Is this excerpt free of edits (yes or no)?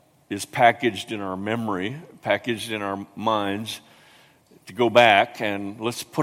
yes